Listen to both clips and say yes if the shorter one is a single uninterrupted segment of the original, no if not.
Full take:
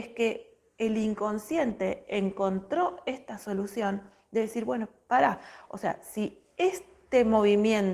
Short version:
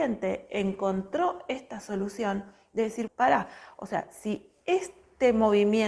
no